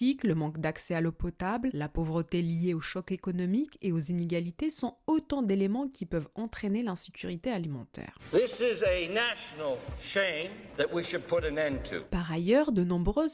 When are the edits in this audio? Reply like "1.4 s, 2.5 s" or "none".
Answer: none

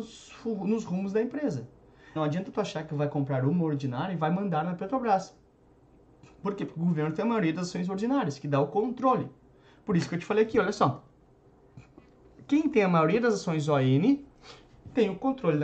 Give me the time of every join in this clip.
2.2 s

